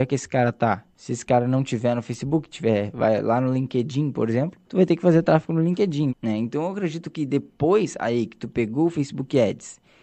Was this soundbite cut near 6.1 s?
yes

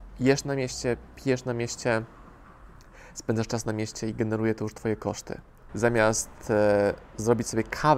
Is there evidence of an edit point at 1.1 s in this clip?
no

